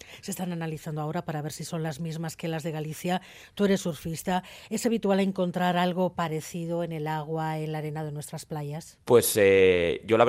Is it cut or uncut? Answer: cut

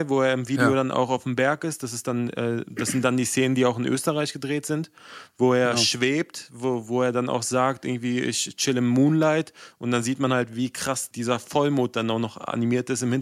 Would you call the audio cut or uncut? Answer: uncut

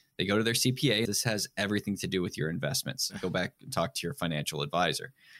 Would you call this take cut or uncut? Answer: cut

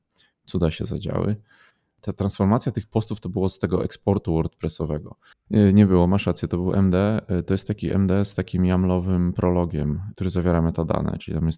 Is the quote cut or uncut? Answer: cut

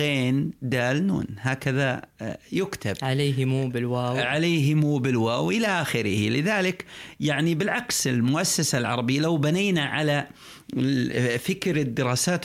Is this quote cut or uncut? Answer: uncut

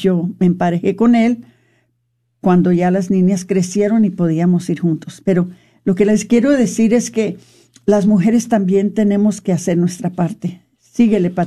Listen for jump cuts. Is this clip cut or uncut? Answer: uncut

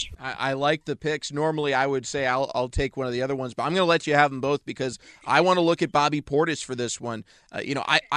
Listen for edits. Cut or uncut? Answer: uncut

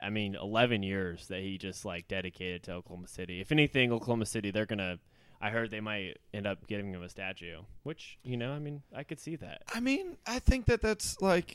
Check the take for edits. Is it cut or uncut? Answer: uncut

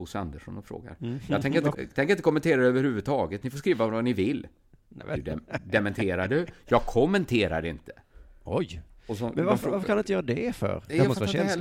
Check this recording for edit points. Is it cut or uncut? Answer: cut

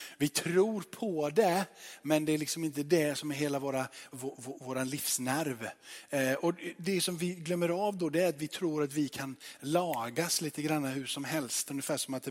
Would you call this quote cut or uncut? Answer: cut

